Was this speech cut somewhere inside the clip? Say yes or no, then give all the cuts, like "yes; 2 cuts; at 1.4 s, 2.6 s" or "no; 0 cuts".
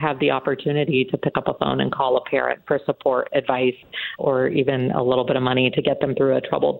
yes; 1 cut; at 4.2 s